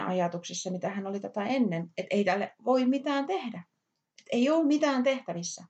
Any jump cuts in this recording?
no; 0 cuts

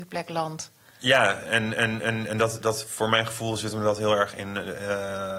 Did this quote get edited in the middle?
no; 0 cuts

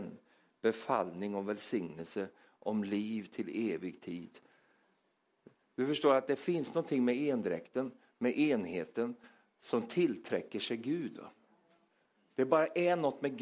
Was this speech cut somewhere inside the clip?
no; 0 cuts

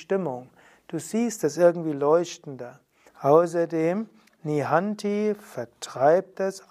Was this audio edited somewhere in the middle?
yes; 1 cut; at 3.1 s

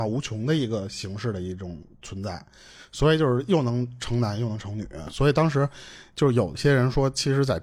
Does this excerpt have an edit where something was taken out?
no; 0 cuts

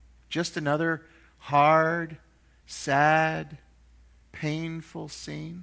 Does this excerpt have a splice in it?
no; 0 cuts

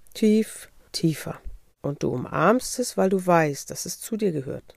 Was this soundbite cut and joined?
no; 0 cuts

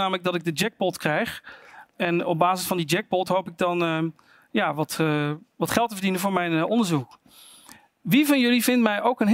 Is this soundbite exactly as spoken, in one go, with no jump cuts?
yes; 0 cuts

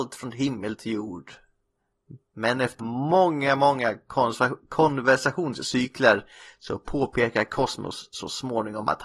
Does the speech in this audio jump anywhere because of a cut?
yes; 1 cut; at 2.8 s

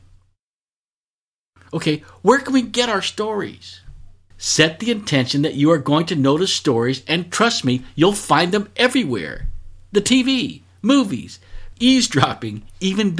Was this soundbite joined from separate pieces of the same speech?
yes; 2 cuts; at 4.3 s, 11.7 s

